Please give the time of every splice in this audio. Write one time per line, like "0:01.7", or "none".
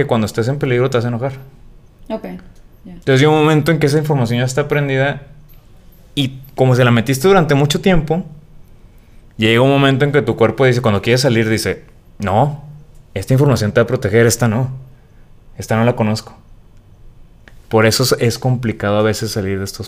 0:03.0